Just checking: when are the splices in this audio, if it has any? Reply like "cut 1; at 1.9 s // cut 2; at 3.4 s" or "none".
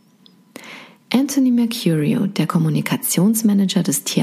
none